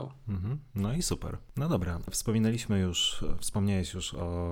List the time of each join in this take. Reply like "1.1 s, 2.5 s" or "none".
none